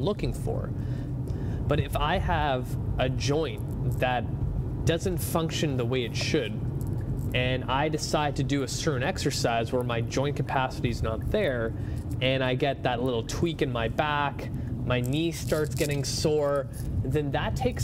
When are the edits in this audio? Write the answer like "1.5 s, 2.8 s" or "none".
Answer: 1.3 s